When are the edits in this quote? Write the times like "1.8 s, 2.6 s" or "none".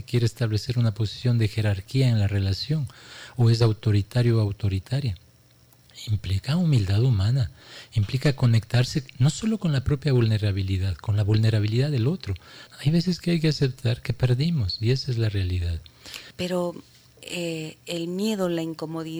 12.7 s, 16.3 s